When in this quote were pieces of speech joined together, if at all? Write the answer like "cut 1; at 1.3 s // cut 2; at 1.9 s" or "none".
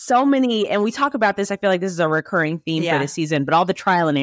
none

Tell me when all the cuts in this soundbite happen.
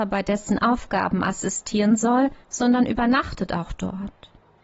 cut 1; at 2.4 s

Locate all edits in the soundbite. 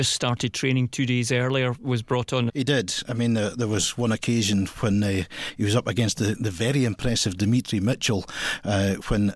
cut 1; at 2.5 s

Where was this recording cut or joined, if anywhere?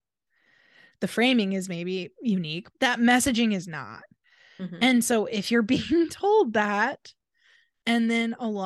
cut 1; at 2.7 s

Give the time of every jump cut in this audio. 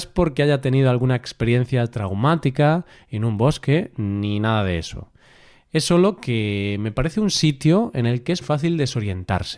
cut 1; at 8.4 s

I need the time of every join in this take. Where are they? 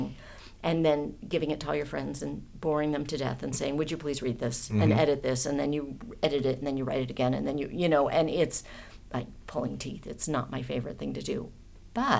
none

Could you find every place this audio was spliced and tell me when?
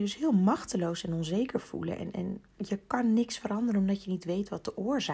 cut 1; at 2.5 s

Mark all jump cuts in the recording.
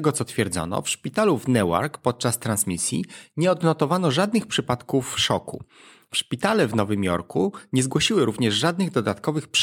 none

